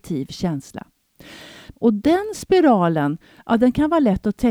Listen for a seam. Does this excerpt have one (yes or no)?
yes